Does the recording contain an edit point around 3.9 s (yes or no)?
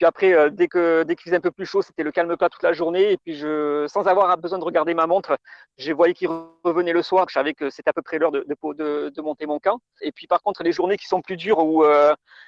no